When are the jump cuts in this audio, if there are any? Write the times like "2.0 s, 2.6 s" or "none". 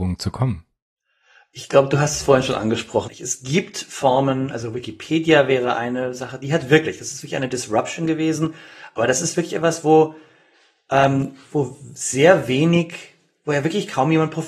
3.1 s